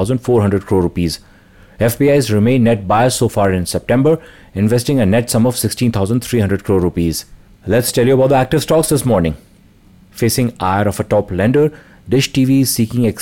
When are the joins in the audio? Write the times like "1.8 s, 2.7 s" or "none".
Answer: none